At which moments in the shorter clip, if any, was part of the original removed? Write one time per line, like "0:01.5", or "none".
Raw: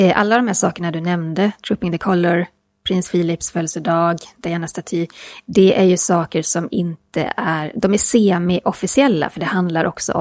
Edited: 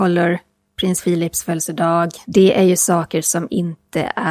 0:02.2